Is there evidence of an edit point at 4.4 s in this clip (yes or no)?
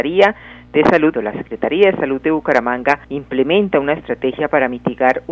no